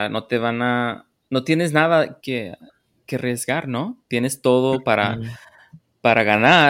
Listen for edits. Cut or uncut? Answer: cut